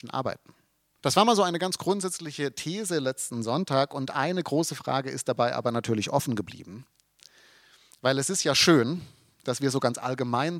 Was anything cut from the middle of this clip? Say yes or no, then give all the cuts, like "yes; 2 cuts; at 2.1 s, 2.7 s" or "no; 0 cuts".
yes; 1 cut; at 1.0 s